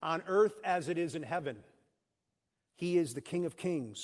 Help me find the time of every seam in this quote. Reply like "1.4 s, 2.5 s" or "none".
2.7 s